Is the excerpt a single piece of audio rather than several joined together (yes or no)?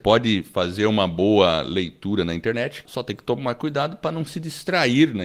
no